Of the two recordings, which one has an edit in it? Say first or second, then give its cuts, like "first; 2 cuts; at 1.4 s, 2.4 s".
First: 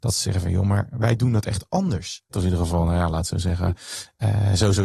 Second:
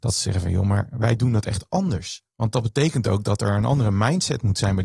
first; 1 cut; at 2.3 s